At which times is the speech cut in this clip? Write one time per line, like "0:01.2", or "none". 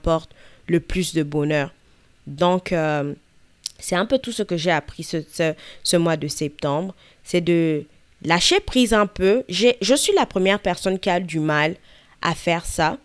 none